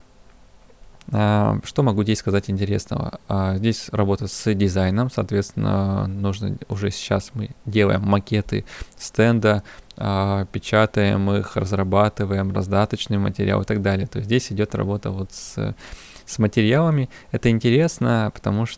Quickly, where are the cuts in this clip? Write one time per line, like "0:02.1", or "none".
0:01.0